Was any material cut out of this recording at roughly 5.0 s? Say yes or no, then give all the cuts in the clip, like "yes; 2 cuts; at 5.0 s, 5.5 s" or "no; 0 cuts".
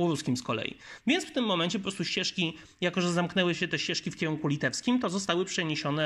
no; 0 cuts